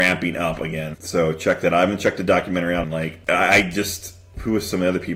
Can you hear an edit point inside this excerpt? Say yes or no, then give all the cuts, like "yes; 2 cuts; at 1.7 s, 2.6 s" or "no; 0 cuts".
yes; 2 cuts; at 0.9 s, 2.8 s